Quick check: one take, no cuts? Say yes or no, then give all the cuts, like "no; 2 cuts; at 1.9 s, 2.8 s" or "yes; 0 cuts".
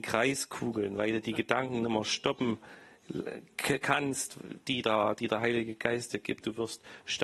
yes; 0 cuts